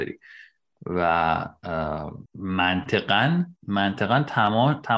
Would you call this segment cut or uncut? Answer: cut